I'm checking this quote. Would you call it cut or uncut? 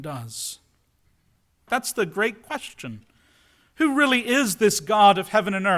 cut